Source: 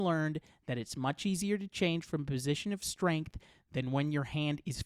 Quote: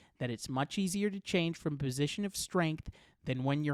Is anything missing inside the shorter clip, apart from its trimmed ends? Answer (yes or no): no